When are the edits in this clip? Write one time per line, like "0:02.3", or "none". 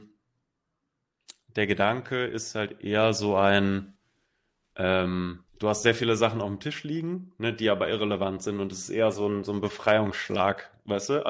0:05.5